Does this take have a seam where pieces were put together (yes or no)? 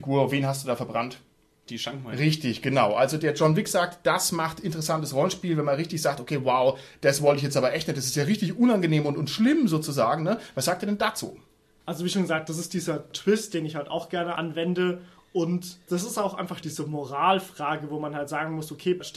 no